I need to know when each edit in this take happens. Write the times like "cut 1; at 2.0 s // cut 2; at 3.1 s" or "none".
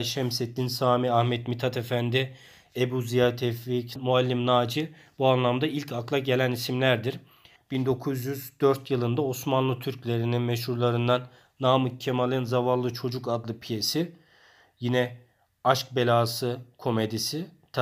cut 1; at 4.0 s // cut 2; at 7.6 s